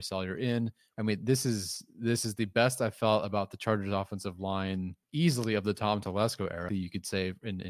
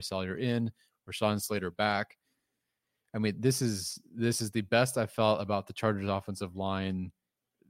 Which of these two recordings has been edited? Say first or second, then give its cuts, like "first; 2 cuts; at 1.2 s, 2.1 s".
first; 3 cuts; at 0.9 s, 5.0 s, 6.7 s